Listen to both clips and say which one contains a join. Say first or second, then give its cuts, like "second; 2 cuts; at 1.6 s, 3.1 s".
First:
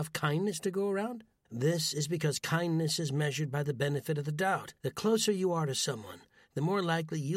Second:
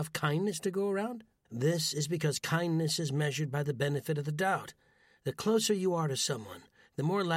first; 1 cut; at 4.8 s